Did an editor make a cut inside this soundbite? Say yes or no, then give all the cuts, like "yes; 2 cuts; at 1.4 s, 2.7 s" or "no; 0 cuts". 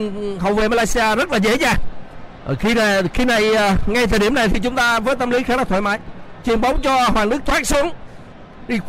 yes; 2 cuts; at 2.4 s, 6.4 s